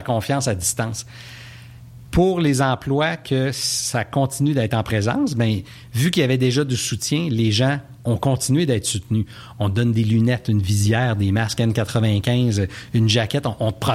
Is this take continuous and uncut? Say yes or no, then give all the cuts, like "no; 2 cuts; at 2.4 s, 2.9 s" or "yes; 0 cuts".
no; 1 cut; at 2.1 s